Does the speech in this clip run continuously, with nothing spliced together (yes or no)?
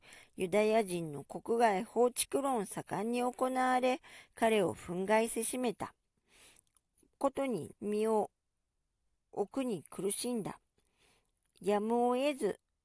no